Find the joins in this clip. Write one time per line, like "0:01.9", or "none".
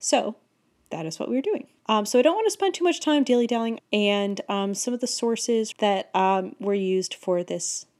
0:01.8
0:03.8
0:05.7